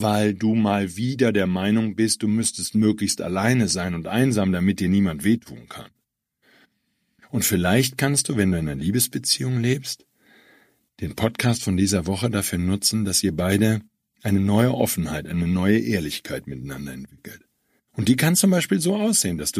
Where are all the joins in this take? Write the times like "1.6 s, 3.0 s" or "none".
none